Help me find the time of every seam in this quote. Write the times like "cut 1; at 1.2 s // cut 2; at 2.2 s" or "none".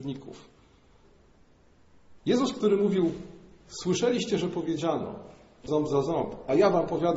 cut 1; at 2.2 s // cut 2; at 5.7 s